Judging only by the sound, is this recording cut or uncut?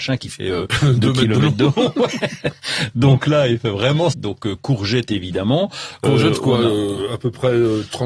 cut